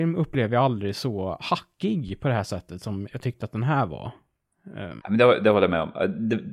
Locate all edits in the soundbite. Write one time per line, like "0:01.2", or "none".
0:03.1
0:05.0